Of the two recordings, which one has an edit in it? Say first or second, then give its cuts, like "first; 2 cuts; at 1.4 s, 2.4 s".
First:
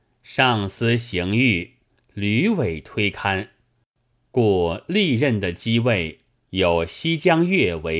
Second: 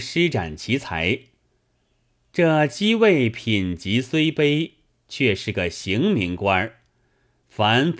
first; 1 cut; at 6.3 s